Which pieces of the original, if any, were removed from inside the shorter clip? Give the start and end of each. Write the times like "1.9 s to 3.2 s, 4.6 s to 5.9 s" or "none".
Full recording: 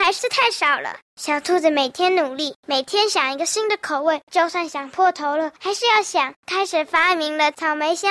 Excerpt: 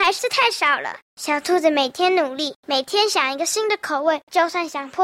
none